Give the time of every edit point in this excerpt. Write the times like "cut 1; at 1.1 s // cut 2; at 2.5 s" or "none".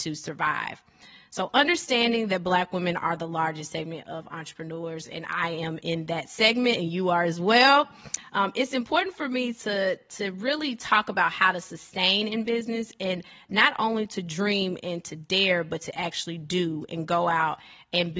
none